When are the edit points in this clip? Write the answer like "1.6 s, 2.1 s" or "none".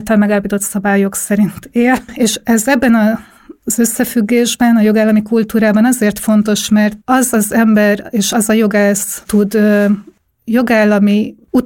7.0 s, 9.2 s

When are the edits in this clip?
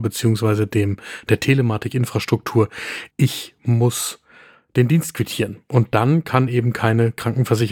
3.1 s

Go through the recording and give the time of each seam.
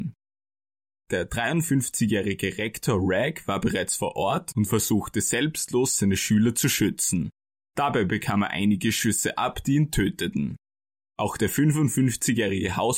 none

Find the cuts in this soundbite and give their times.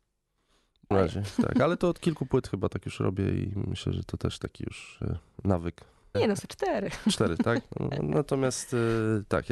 0.9 s, 6.1 s

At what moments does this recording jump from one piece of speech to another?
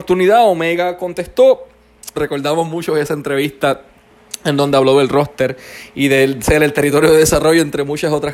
2.2 s

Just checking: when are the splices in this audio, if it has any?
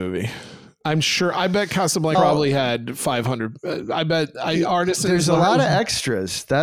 2.1 s

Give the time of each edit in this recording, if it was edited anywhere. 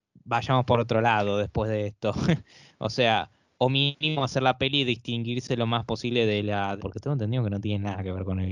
6.8 s

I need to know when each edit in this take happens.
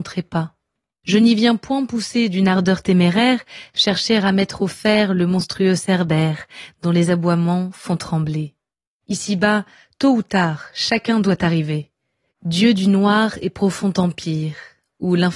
1.0 s, 9.0 s, 12.3 s

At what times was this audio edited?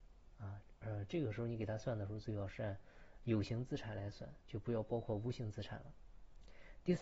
none

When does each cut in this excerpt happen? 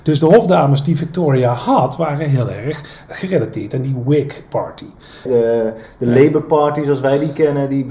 3.1 s, 5.3 s

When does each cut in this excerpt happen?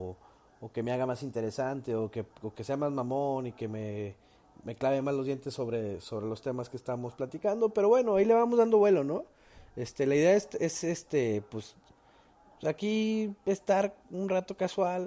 none

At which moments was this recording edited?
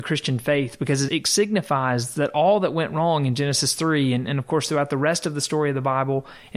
1.1 s

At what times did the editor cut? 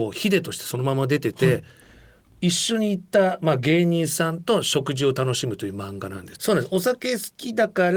6.4 s

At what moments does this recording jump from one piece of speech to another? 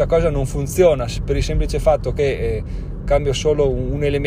none

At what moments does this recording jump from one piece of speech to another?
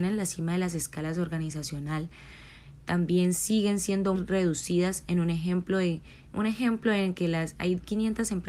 4.1 s

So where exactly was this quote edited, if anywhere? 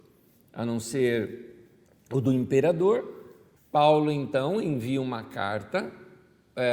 3.6 s

